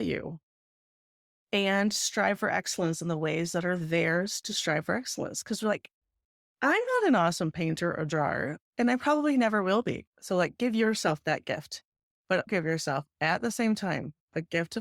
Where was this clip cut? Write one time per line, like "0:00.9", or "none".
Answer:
0:10.1
0:12.5